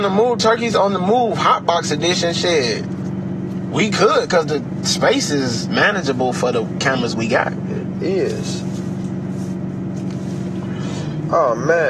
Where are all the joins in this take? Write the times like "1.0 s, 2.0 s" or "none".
none